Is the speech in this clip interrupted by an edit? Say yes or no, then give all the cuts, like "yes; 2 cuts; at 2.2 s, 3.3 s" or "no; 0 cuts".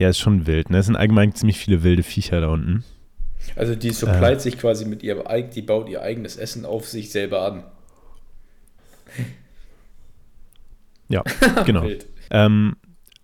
yes; 2 cuts; at 8.8 s, 12.3 s